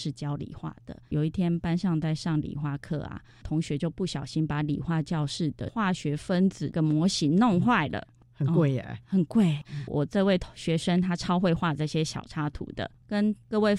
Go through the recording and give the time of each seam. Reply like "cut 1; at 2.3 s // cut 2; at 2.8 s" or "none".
cut 1; at 9.6 s